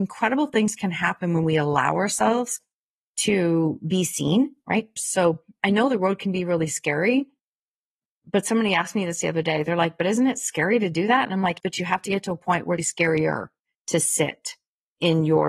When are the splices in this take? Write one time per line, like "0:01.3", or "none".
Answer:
0:05.0
0:11.6
0:12.8